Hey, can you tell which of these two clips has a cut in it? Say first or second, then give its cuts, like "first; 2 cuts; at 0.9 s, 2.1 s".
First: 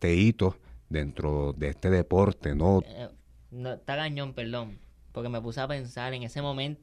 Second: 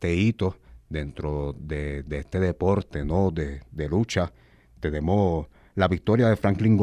first; 2 cuts; at 1.5 s, 2.8 s